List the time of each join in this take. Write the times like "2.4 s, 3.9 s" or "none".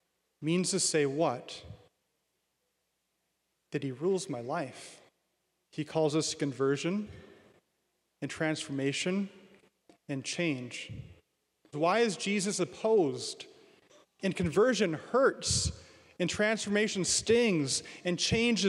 5.6 s, 11.7 s, 14.0 s